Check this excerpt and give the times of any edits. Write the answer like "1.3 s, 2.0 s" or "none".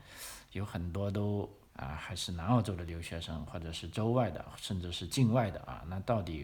1.7 s